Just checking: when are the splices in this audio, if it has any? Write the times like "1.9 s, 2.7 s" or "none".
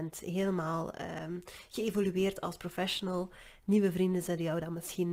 none